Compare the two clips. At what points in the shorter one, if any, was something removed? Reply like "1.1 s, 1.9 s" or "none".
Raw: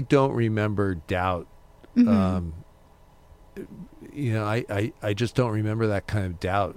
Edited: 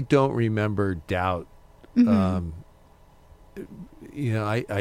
none